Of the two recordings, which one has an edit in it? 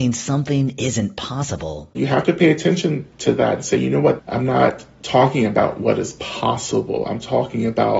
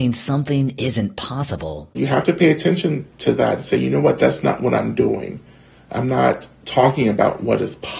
first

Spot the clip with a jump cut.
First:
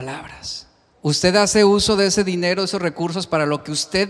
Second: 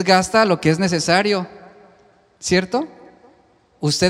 first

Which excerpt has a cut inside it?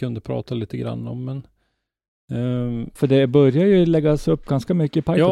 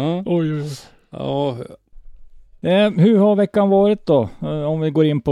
first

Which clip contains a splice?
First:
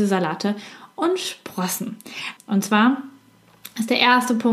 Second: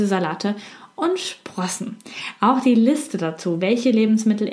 first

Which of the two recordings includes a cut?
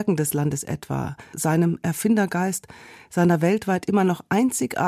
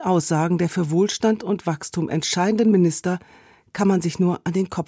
first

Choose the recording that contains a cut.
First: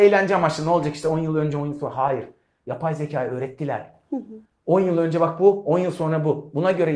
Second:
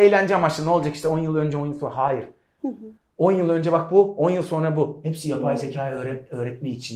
second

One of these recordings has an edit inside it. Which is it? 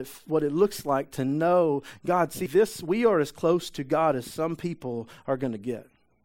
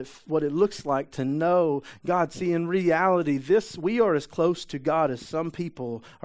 first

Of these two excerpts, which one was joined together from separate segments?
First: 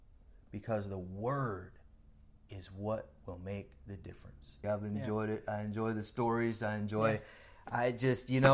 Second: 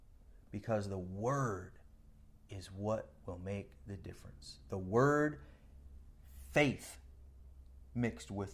first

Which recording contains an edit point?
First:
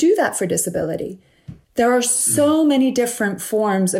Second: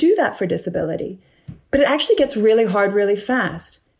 first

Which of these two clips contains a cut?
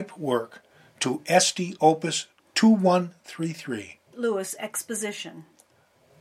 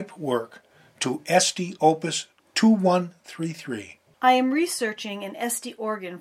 first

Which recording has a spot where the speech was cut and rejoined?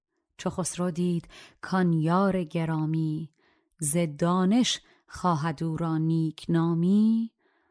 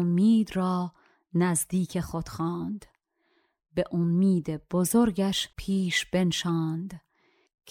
second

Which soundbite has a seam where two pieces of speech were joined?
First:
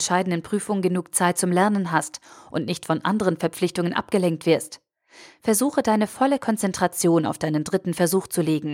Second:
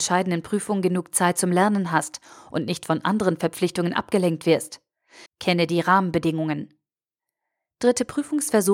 second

